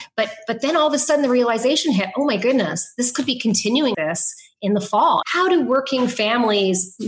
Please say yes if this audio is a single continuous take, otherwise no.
no